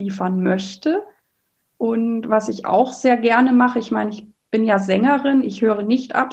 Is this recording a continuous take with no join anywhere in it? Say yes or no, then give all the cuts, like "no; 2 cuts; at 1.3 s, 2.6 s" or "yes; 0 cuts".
yes; 0 cuts